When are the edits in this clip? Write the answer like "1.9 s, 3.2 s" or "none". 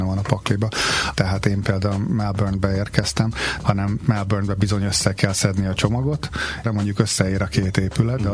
1.1 s, 3.6 s, 6.6 s